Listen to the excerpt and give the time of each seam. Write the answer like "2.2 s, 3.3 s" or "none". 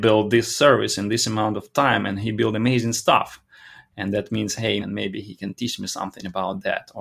4.8 s